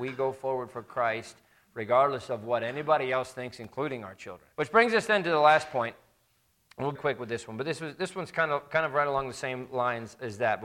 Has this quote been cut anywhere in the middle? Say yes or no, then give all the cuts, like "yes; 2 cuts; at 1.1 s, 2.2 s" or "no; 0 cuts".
yes; 2 cuts; at 4.5 s, 6.9 s